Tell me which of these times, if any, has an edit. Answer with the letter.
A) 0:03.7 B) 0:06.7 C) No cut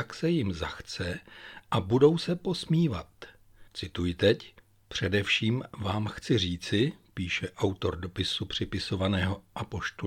A